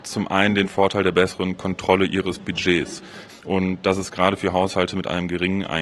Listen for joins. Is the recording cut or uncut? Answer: cut